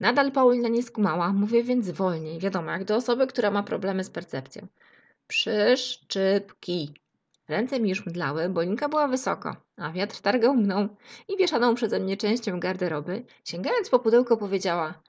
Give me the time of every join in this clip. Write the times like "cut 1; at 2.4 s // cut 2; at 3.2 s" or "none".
cut 1; at 13.3 s